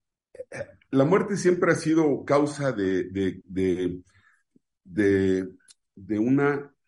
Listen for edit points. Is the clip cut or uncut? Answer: uncut